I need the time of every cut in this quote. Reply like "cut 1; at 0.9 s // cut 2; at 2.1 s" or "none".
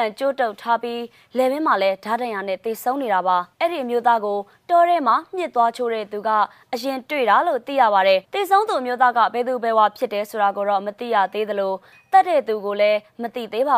cut 1; at 3.5 s // cut 2; at 8.2 s